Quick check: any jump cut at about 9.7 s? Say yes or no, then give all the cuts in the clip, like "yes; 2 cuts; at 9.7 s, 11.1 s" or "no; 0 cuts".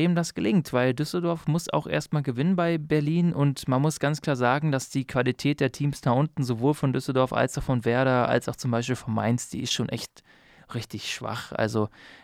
no; 0 cuts